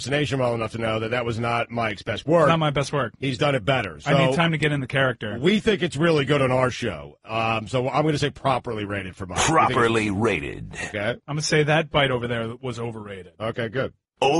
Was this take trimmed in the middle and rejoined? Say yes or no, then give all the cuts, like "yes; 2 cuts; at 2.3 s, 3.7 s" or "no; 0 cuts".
no; 0 cuts